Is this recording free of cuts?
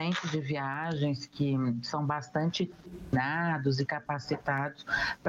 yes; 0 cuts

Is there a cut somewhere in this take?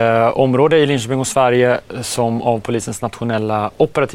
no; 0 cuts

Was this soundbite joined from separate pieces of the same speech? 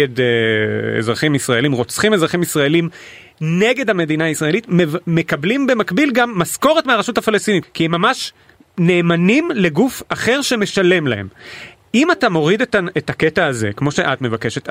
yes; 1 cut; at 7.6 s

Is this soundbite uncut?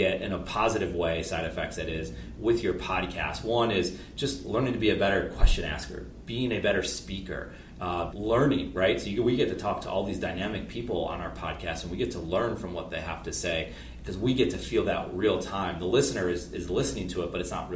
no; 1 cut; at 8.1 s

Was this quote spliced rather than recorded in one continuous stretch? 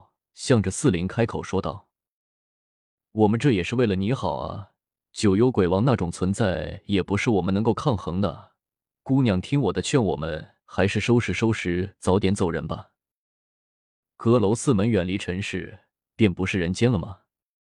no; 0 cuts

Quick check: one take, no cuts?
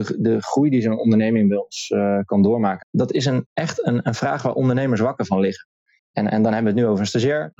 no; 1 cut; at 2.8 s

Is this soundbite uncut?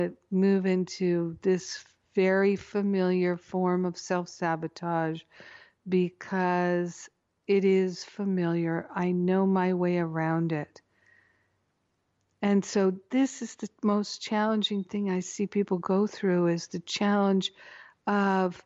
yes; 0 cuts

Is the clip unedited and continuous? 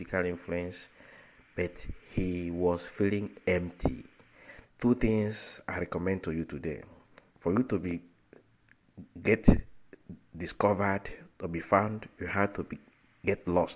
no; 1 cut; at 4.6 s

